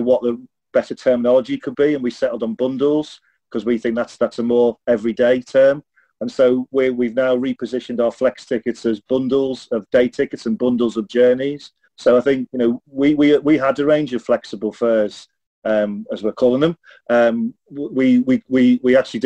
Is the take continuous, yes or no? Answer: no